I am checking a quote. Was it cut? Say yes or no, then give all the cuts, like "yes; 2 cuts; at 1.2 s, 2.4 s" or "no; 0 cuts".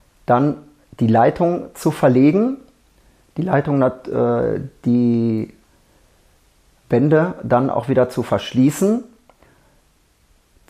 no; 0 cuts